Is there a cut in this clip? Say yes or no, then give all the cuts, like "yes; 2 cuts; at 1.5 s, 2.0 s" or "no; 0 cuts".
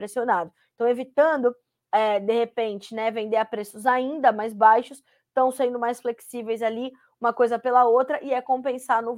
no; 0 cuts